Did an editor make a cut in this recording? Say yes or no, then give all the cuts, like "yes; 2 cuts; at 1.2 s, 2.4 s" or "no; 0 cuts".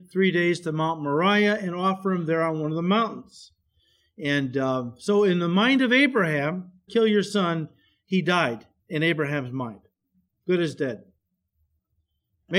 yes; 1 cut; at 6.9 s